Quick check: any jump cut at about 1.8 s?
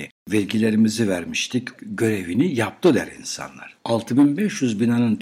yes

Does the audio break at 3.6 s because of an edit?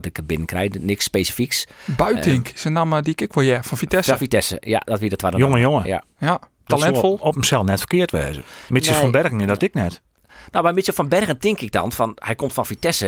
no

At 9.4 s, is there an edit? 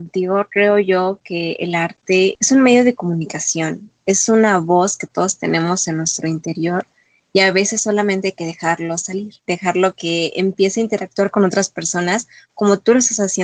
yes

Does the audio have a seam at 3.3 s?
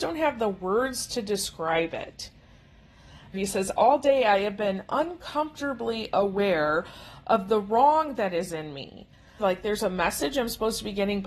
yes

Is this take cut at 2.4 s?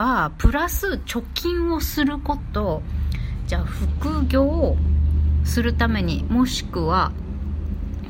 yes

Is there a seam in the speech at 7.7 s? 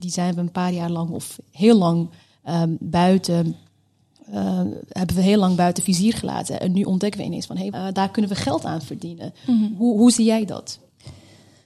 yes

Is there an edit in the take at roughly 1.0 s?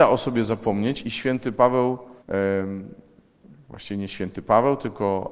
yes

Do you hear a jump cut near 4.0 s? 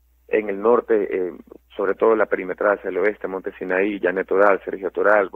no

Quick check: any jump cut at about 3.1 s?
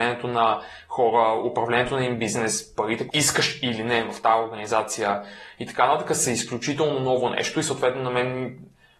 yes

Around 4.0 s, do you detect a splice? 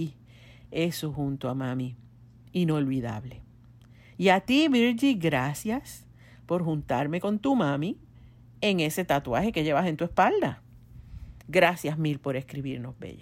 no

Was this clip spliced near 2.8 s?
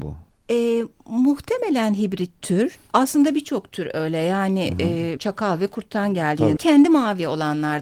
no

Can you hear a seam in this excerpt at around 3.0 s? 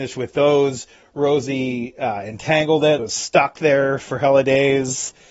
yes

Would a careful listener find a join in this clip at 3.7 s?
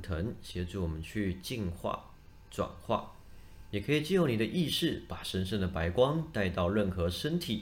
no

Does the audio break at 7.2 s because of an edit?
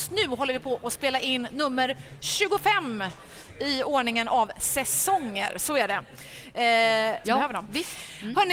yes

